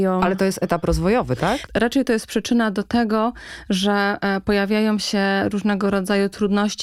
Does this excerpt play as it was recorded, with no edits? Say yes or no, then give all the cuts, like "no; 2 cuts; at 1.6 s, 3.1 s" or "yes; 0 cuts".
no; 1 cut; at 1.7 s